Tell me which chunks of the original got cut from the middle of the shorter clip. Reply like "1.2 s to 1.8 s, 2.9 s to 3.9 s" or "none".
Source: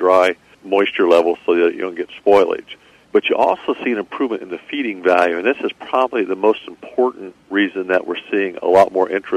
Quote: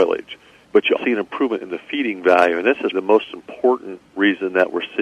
3.4 s to 3.8 s, 5.7 s to 6.3 s